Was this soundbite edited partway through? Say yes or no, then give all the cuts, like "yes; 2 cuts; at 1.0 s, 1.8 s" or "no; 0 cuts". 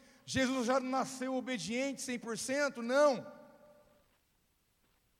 no; 0 cuts